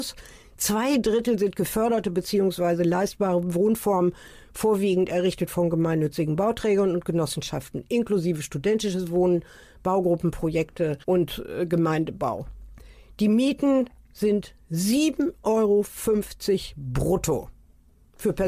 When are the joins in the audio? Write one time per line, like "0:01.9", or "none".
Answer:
0:11.0